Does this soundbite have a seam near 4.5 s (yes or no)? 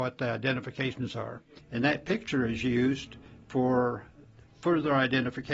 no